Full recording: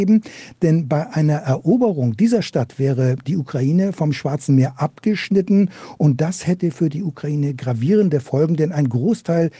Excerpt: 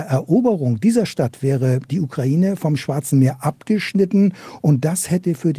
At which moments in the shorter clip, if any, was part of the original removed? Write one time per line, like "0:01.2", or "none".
none

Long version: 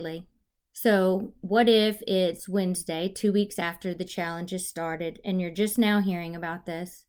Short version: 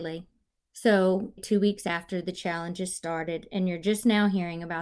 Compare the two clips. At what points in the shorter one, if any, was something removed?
0:01.4

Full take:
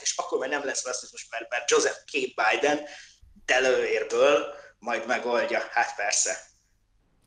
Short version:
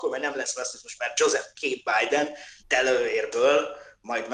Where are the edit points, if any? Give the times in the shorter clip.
0:01.0
0:02.6

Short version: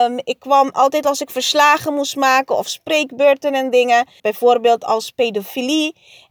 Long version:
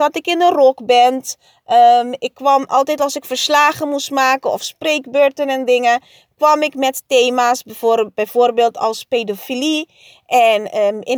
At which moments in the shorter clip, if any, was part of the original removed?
0:04.2

